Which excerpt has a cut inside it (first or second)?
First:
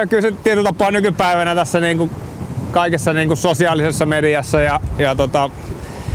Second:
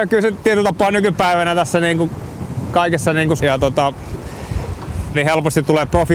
second